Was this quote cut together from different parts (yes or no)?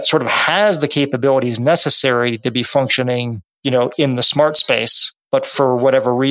no